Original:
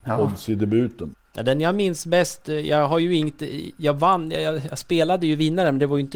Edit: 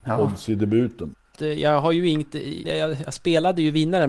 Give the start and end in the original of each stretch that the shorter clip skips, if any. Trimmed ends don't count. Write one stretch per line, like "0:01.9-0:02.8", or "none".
0:01.4-0:02.4
0:03.7-0:04.3